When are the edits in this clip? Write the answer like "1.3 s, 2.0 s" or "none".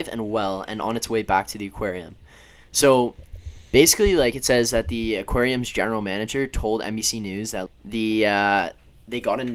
7.7 s